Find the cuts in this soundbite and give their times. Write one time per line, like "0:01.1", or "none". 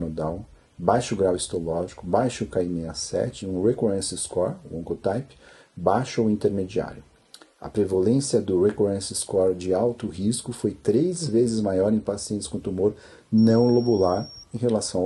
none